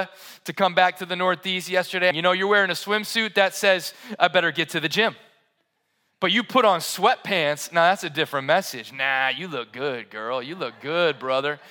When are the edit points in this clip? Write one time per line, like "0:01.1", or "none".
0:02.1